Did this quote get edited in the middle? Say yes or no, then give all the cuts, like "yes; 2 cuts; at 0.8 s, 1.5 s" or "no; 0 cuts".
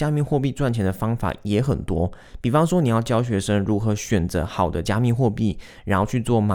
no; 0 cuts